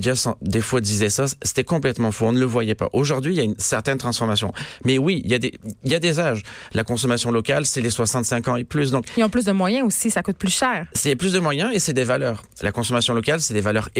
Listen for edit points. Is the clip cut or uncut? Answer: uncut